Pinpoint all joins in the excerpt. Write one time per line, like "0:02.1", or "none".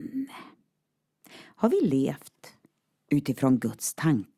0:01.2